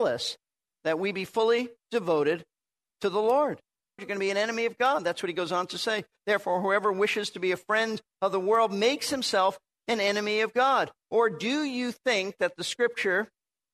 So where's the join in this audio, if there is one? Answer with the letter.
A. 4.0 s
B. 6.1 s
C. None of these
A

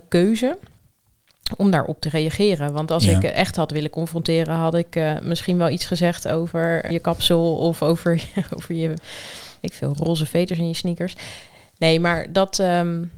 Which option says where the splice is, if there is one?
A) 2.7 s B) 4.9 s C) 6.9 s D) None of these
C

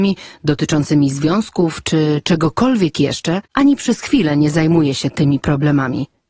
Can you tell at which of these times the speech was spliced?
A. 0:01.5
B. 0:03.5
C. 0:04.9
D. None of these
B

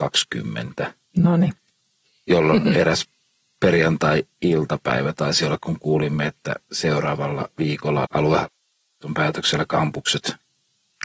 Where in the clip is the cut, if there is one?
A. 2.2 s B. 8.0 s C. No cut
B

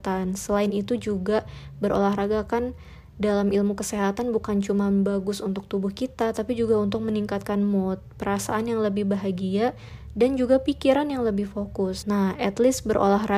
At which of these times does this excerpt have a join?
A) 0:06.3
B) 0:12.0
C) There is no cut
B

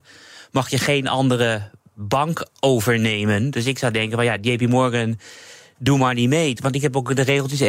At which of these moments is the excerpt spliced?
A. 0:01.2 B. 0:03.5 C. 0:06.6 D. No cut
C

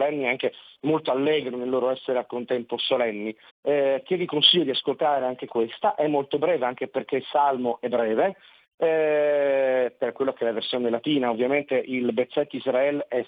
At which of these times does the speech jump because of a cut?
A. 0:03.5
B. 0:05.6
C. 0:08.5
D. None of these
A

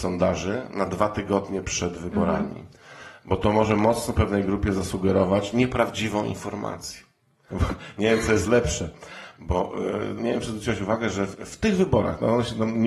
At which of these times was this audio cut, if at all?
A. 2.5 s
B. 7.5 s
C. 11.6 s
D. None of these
B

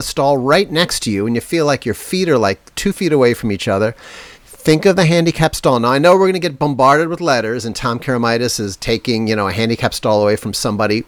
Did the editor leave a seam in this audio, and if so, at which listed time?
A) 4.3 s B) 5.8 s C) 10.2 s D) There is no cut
A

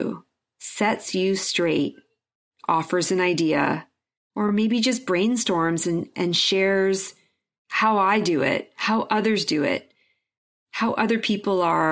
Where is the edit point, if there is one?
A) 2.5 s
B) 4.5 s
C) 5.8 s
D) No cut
D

